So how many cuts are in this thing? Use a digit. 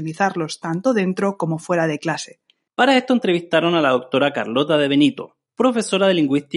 1